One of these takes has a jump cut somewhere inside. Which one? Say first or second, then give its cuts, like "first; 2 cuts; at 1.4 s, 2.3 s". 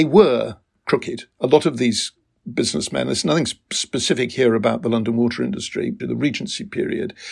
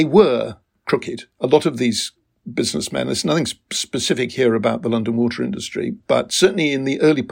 first; 1 cut; at 6.0 s